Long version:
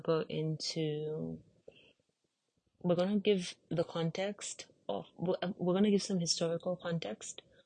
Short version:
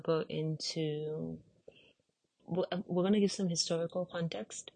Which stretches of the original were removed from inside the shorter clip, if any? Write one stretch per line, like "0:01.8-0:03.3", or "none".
0:02.4-0:05.1